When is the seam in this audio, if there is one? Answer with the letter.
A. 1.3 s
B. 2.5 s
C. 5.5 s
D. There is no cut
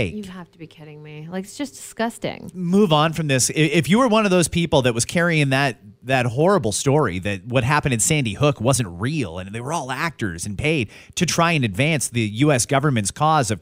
B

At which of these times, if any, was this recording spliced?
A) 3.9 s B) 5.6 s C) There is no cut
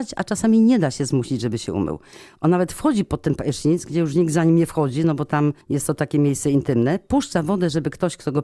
B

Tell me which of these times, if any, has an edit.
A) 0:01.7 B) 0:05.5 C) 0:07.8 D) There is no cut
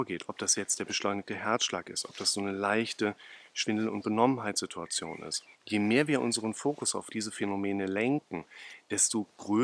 B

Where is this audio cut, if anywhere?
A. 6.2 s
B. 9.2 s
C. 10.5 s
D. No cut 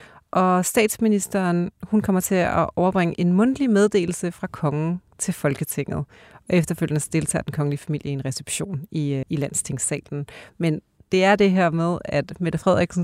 B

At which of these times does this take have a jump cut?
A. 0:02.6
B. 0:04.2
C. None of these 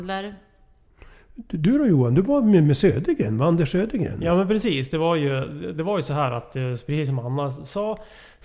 C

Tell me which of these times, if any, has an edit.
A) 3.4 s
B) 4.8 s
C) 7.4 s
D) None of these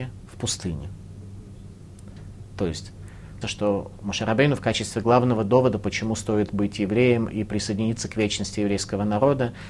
A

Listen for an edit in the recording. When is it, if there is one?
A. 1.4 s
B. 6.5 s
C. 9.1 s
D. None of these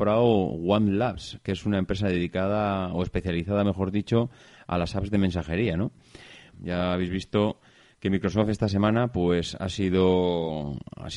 B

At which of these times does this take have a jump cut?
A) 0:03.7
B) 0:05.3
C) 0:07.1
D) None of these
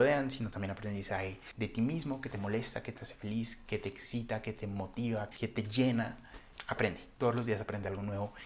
B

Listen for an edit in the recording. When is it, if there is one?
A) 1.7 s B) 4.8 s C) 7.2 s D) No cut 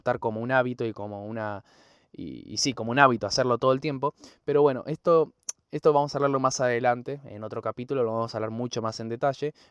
D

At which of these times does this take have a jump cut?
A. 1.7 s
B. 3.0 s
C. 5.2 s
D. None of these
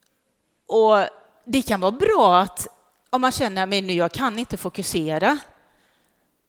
D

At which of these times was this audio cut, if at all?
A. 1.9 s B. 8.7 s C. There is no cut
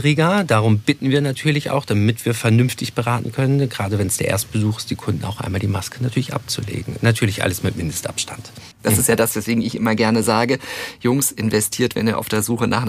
B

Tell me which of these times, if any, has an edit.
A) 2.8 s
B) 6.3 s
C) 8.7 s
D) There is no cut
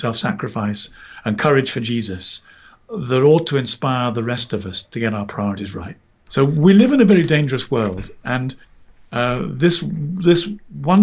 B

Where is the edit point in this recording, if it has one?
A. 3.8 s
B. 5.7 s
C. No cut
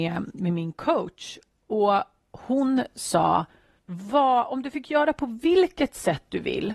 A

